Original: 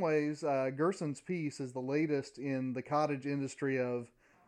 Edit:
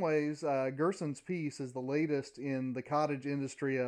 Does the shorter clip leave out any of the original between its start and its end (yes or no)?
no